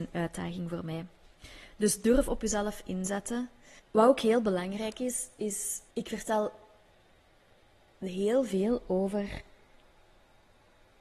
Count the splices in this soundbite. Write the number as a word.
two